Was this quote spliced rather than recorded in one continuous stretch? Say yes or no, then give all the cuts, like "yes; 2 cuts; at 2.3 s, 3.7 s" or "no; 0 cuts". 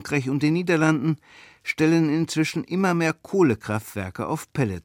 no; 0 cuts